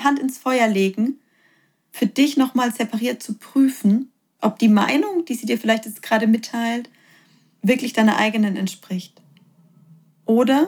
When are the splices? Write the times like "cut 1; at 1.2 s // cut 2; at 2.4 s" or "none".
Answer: none